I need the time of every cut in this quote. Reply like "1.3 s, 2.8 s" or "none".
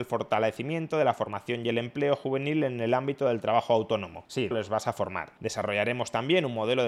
4.5 s